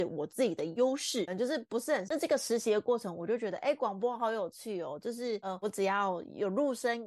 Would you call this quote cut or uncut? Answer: cut